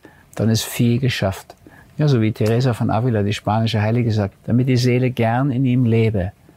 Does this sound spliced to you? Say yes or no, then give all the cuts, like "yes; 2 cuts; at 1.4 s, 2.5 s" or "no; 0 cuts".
yes; 1 cut; at 4.3 s